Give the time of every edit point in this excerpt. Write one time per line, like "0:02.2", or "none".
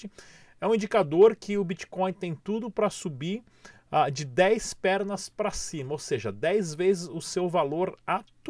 none